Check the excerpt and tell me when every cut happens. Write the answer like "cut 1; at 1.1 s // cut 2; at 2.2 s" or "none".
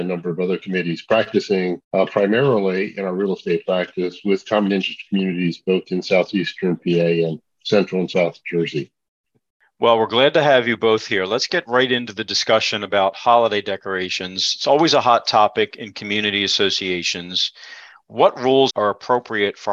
cut 1; at 1.8 s // cut 2; at 18.7 s